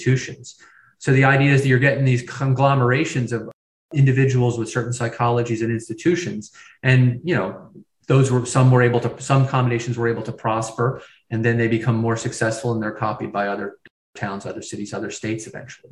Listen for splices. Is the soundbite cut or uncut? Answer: uncut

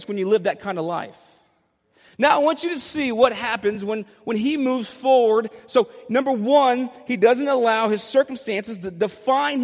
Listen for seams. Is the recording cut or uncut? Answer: uncut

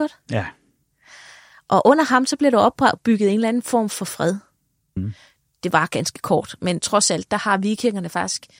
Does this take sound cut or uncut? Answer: cut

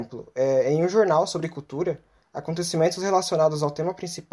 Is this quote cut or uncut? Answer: uncut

